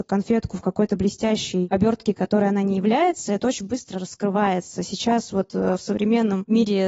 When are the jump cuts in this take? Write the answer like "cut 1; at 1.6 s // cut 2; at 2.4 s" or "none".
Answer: none